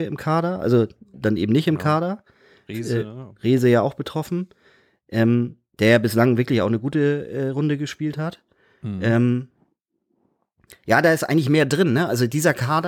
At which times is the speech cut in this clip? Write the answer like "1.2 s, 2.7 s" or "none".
none